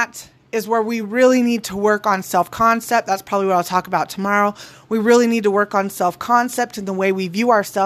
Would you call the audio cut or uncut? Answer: uncut